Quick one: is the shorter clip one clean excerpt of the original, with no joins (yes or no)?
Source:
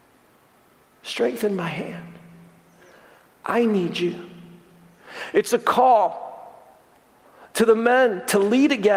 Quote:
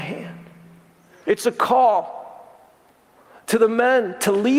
no